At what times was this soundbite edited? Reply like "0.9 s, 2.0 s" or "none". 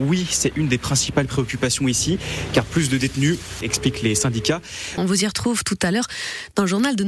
3.6 s, 5.0 s